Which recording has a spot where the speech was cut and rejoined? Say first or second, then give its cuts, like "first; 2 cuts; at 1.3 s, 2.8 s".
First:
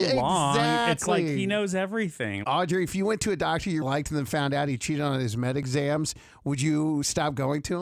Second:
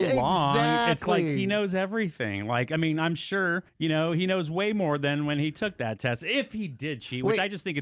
first; 2 cuts; at 2.4 s, 3.8 s